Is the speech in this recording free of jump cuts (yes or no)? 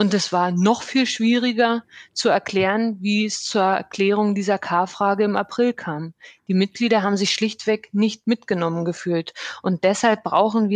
yes